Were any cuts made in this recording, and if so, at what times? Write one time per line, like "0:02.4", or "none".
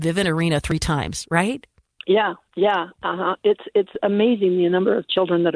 none